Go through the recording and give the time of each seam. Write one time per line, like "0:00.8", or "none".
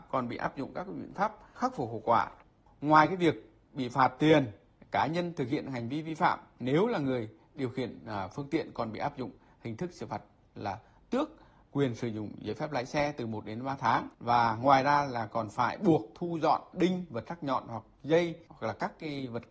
0:14.1